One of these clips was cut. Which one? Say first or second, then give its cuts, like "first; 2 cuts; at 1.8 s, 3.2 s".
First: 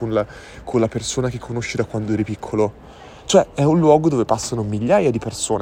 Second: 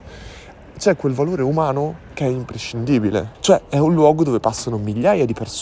second; 1 cut; at 3.3 s